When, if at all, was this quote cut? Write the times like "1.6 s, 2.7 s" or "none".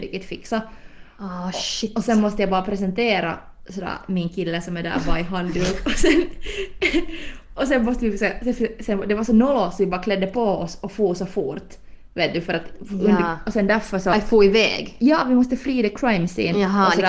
none